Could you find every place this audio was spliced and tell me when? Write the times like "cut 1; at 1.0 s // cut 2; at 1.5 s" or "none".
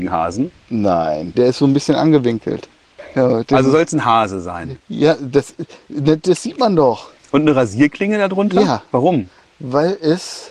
cut 1; at 1.3 s